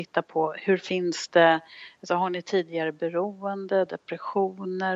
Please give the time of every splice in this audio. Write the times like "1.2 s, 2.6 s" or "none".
none